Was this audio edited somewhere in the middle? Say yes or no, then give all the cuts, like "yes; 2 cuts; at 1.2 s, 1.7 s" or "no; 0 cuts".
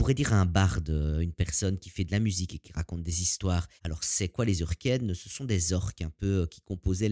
yes; 1 cut; at 3.8 s